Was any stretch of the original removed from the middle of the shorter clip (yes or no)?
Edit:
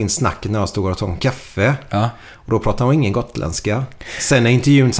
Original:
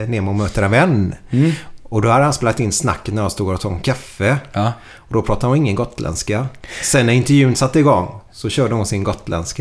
no